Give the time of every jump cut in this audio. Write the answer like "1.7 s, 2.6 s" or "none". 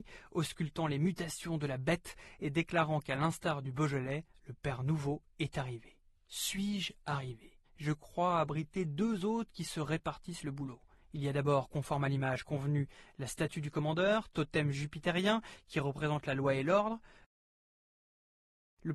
7.6 s